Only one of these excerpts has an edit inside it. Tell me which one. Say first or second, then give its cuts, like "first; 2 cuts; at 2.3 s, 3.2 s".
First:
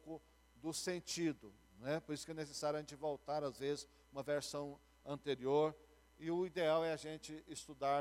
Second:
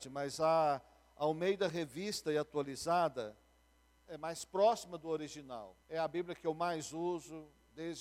second; 2 cuts; at 4.1 s, 5.8 s